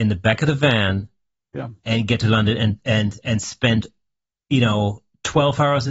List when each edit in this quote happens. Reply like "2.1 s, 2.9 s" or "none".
none